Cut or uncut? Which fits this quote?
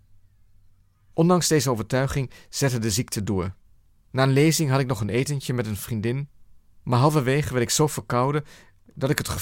uncut